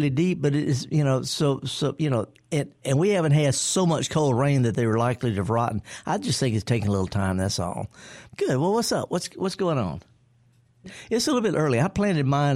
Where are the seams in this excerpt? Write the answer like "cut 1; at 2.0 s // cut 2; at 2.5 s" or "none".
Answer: cut 1; at 8.3 s // cut 2; at 10.8 s